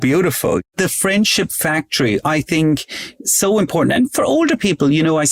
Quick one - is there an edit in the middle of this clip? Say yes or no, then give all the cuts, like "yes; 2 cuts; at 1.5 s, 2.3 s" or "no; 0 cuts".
no; 0 cuts